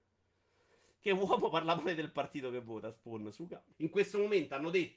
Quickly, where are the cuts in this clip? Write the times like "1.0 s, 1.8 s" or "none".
3.7 s